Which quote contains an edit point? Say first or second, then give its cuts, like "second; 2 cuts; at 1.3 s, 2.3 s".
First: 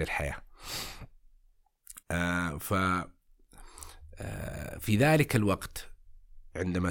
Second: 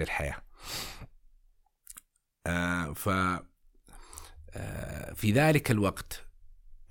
first; 1 cut; at 2.0 s